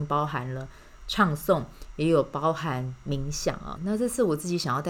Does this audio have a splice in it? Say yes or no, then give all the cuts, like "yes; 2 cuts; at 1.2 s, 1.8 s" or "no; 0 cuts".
yes; 1 cut; at 3.8 s